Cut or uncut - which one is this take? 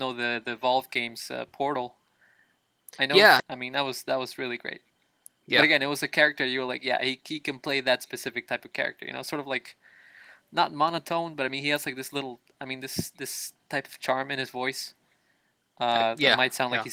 cut